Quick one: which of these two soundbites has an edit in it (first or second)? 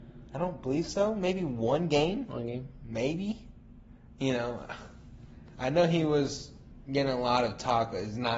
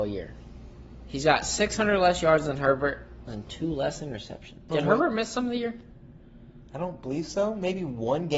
second